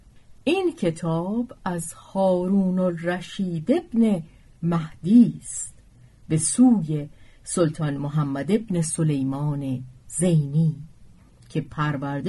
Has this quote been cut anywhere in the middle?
no; 0 cuts

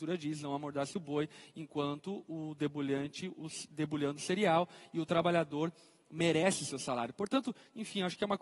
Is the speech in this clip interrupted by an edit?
no; 0 cuts

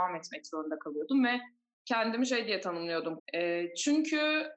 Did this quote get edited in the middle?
yes; 1 cut; at 3.2 s

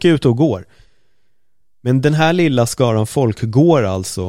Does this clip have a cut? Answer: no; 0 cuts

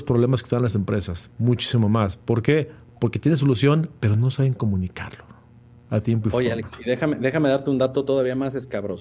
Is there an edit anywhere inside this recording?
no; 0 cuts

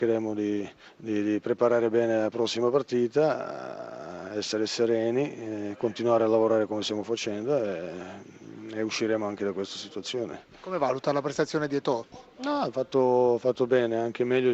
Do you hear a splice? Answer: no; 0 cuts

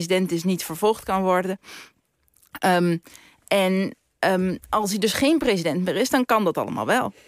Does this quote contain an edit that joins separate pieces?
no; 0 cuts

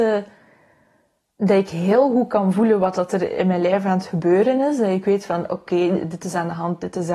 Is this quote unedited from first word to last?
yes; 0 cuts

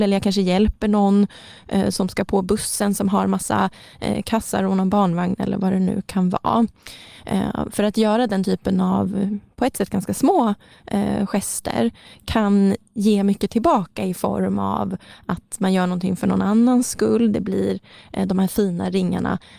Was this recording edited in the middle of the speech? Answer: no; 0 cuts

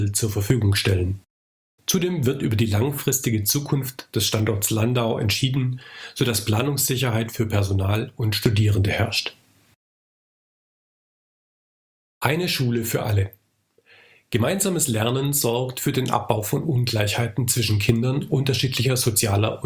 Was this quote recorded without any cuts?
yes; 0 cuts

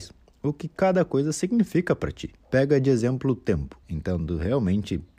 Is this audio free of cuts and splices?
no; 1 cut; at 3.8 s

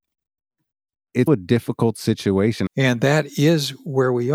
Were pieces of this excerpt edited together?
yes; 2 cuts; at 1.3 s, 2.7 s

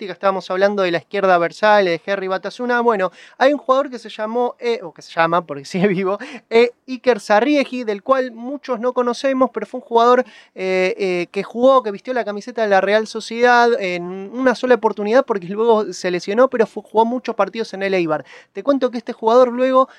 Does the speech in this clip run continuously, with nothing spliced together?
yes; 0 cuts

